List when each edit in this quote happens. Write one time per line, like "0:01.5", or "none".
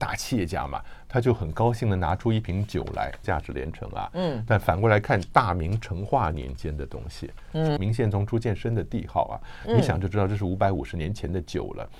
0:03.2
0:07.8